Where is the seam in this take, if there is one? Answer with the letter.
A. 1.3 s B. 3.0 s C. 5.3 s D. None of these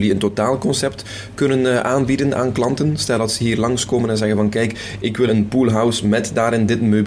C